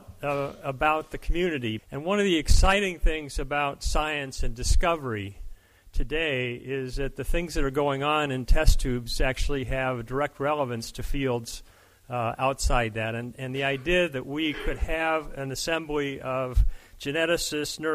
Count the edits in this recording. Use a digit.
1